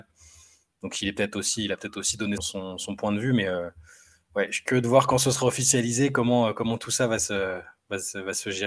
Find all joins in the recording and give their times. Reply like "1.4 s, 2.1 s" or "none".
2.4 s